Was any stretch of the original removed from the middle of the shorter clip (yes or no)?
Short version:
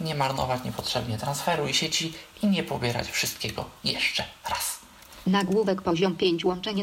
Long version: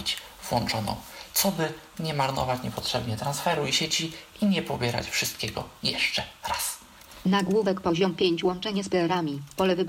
no